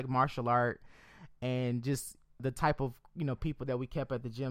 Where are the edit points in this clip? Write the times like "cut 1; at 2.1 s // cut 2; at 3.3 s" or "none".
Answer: cut 1; at 2.4 s